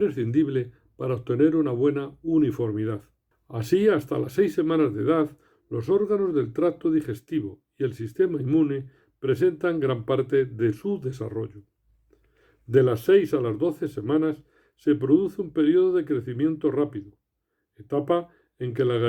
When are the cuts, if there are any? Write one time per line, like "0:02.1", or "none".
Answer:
0:03.3